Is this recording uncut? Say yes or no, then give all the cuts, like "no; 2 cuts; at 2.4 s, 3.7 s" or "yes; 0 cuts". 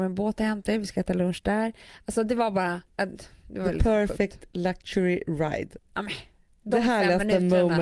no; 2 cuts; at 2.9 s, 5.8 s